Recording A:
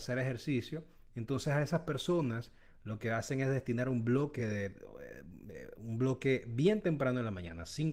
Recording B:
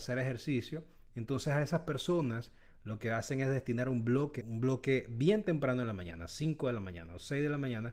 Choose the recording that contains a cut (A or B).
B